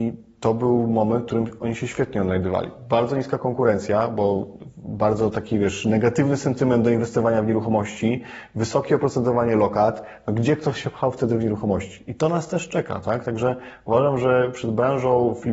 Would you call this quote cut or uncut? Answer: uncut